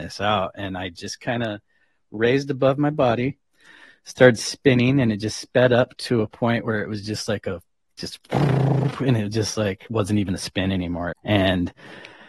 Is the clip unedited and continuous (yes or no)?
no